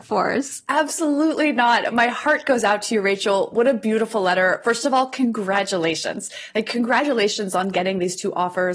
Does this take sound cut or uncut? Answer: uncut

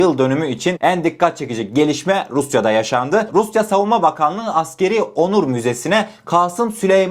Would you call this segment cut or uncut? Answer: uncut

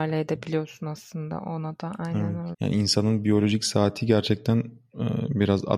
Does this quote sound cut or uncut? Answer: cut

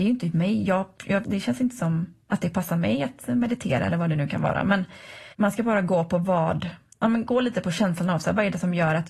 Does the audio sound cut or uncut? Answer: cut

